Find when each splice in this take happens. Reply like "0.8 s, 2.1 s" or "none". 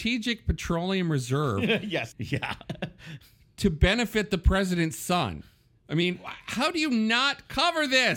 2.1 s

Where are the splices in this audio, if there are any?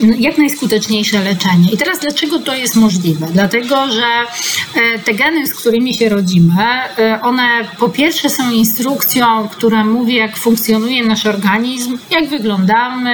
none

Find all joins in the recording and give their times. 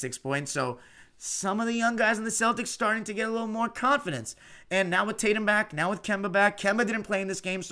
none

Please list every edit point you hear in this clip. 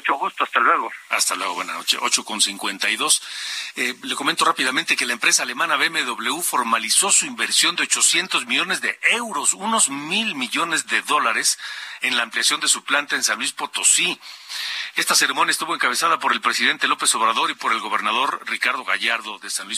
none

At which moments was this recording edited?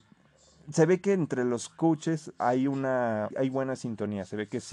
3.3 s

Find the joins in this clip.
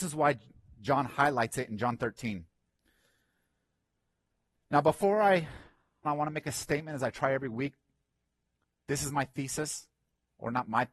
6.0 s

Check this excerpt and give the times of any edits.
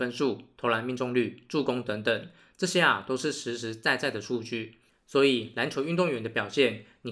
none

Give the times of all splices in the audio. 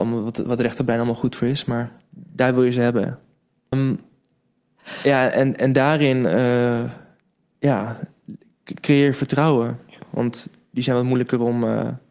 3.7 s, 10.1 s

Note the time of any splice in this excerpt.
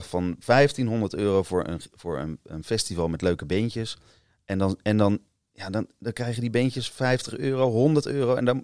none

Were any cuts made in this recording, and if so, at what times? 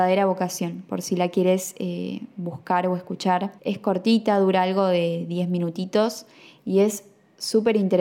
3.6 s

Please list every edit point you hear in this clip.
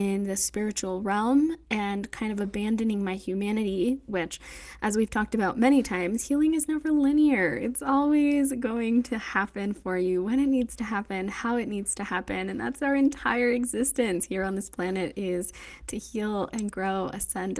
4.1 s

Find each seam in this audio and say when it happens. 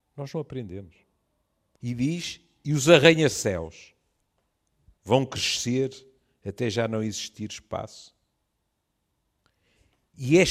1.8 s, 5.0 s

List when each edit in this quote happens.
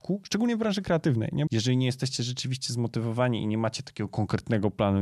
1.5 s

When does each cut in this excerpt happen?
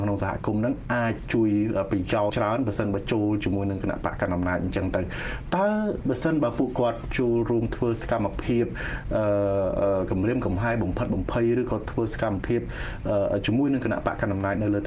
2.3 s

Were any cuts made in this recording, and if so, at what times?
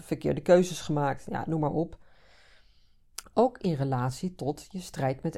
3.2 s

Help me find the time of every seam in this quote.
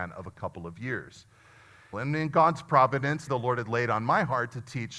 1.9 s, 3.3 s

